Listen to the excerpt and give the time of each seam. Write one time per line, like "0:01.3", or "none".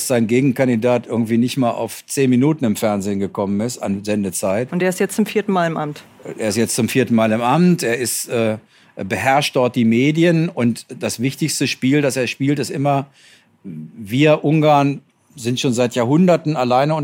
none

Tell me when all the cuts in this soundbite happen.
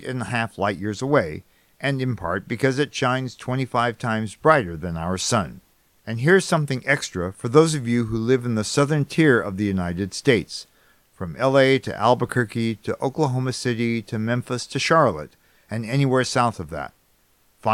none

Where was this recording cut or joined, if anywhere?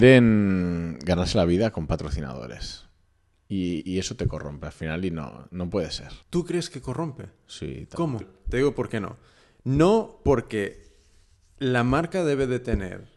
0:06.2
0:08.2

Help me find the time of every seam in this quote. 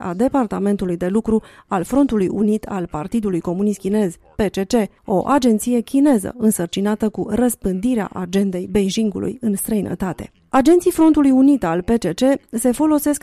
none

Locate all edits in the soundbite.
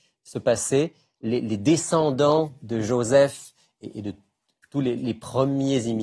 0:02.6

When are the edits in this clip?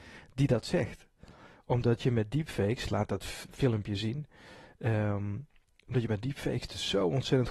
none

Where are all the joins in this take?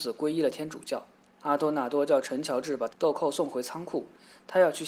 0:01.4
0:02.9

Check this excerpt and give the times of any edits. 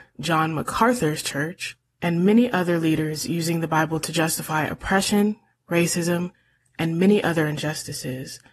0:06.6

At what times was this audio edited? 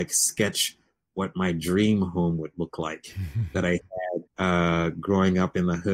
0:04.3

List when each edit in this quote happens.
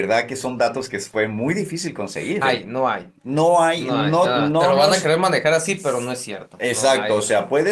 0:02.4

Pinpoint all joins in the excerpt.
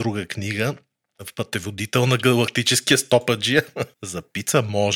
0:03.9

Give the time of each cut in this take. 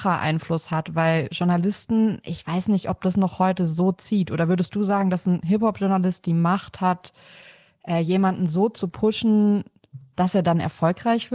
none

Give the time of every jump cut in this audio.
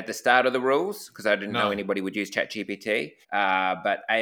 0:03.2

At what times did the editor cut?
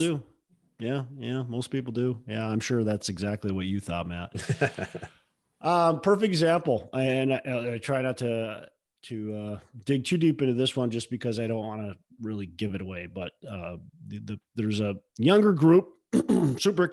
none

